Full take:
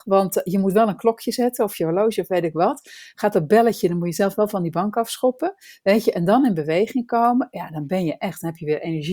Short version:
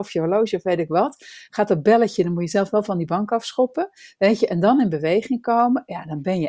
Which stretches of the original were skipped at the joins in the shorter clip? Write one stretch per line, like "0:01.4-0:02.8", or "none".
none

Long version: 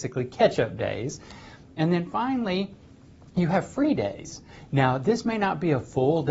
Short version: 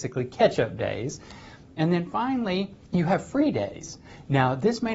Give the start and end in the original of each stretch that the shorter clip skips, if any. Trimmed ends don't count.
0:02.8-0:03.3

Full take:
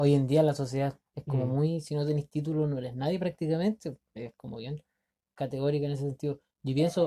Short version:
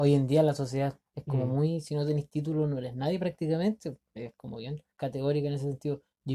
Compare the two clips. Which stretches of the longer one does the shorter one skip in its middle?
0:04.9-0:05.3

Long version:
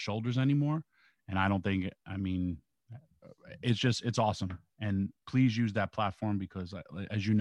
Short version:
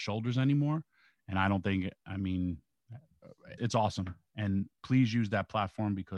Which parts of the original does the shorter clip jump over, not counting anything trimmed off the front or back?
0:03.6-0:04.0

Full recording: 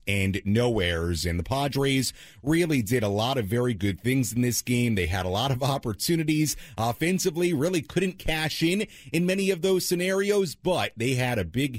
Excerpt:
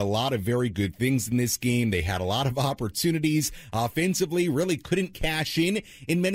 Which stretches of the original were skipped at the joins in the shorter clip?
none

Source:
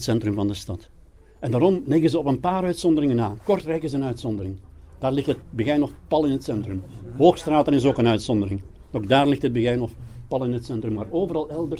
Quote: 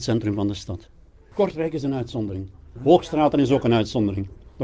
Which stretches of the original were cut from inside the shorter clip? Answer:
0:01.3-0:03.4
0:04.9-0:07.1

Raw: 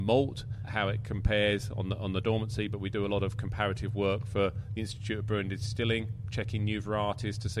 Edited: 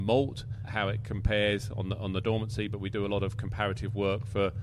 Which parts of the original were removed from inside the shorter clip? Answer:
none

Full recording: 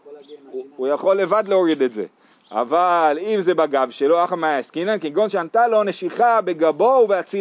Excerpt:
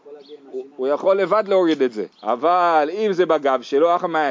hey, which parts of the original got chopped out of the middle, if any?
0:02.1-0:02.4

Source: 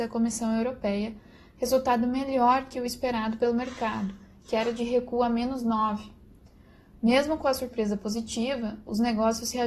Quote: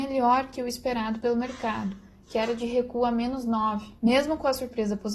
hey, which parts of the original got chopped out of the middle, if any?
0:06.2-0:07.0

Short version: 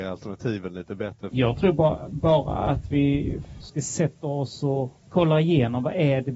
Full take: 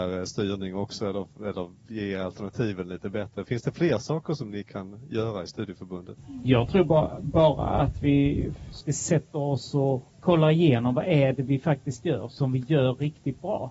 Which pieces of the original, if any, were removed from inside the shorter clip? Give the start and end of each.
0:03.5-0:06.4

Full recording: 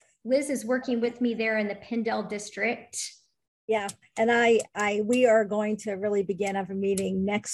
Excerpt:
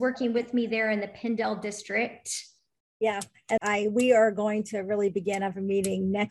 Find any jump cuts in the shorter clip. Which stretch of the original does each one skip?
0:04.2-0:04.7

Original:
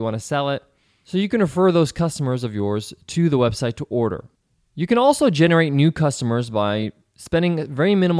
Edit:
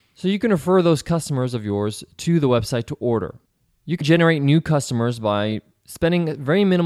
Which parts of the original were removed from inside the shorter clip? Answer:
0:04.9-0:05.3

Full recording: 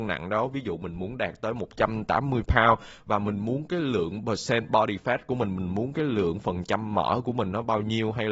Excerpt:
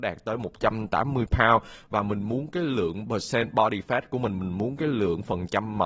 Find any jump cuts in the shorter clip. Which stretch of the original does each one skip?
none

